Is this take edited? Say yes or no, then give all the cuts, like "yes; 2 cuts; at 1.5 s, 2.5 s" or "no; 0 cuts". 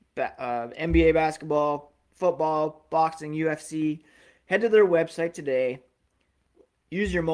no; 0 cuts